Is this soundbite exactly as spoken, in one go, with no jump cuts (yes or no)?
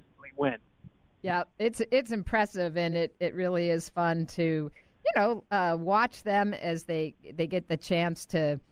yes